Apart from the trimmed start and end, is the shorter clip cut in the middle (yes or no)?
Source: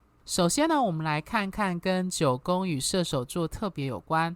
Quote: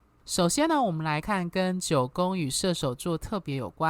yes